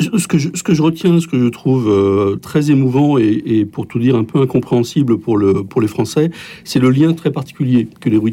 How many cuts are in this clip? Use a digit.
1